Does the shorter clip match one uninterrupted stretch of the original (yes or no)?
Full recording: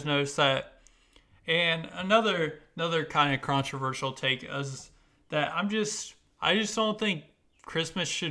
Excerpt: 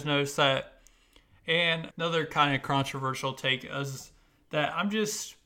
no